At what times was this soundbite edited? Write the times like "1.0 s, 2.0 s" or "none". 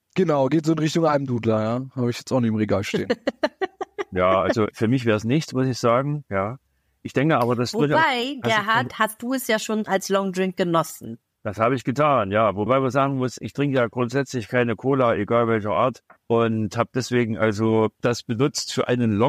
8.9 s